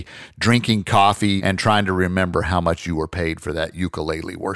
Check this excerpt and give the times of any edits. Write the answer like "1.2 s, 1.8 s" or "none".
1.4 s